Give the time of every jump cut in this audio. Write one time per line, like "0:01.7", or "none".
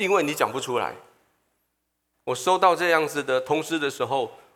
0:02.1